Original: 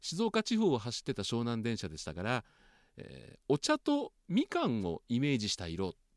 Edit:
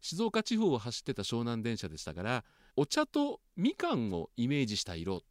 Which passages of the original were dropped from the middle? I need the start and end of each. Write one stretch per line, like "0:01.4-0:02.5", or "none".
0:02.7-0:03.4